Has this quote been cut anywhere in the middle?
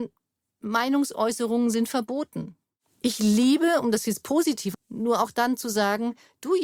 yes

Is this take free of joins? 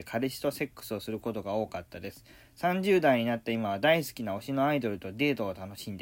yes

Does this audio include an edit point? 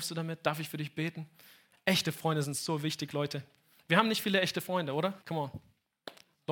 yes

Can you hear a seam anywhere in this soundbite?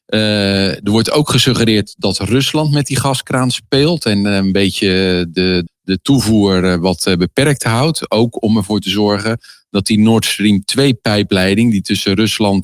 yes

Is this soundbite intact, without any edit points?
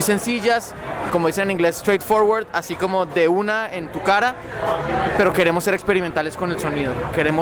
no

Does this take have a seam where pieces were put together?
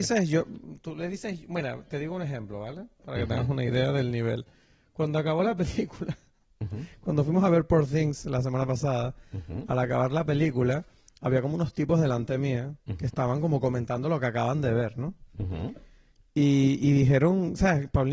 no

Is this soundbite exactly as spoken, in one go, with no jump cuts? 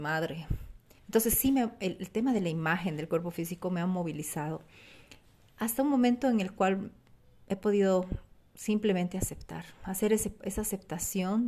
no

